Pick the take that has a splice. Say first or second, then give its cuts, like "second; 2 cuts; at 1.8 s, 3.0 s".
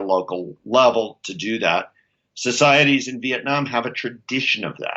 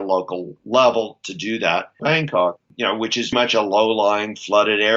second; 2 cuts; at 2.0 s, 3.3 s